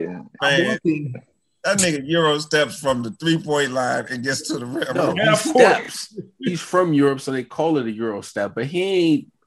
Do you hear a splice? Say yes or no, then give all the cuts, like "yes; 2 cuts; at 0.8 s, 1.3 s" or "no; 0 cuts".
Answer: no; 0 cuts